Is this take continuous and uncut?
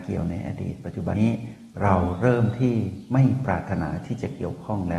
no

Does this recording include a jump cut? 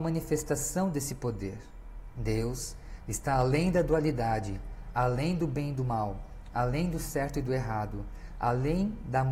yes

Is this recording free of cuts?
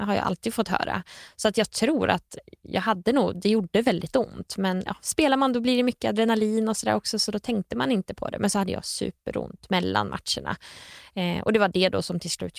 yes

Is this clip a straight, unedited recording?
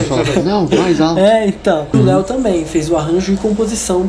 no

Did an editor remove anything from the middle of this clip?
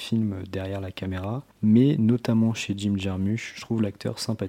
yes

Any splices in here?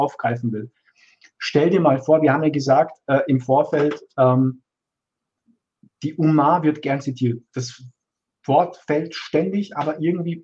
no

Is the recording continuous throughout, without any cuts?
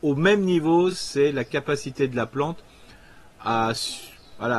yes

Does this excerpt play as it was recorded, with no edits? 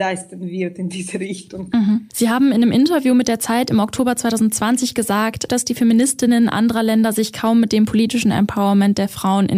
no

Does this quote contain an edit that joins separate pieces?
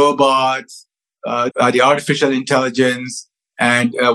yes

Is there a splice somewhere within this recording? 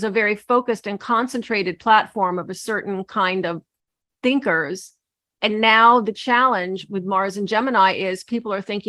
no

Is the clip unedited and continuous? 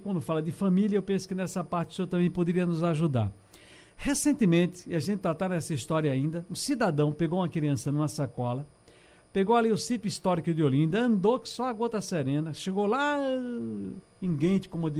yes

